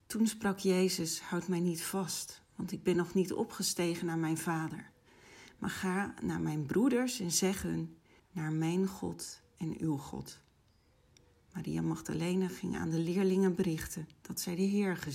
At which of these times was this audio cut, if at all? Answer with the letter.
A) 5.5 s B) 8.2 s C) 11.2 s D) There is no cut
B